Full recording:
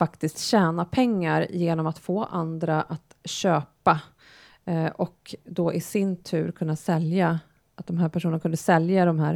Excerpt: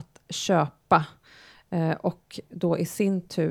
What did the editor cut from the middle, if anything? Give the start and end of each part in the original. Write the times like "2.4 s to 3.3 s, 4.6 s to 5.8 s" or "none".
none